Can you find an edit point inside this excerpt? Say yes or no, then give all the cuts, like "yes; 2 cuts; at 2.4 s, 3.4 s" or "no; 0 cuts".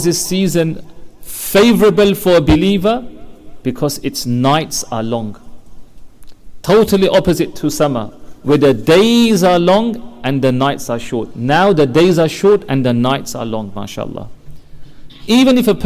no; 0 cuts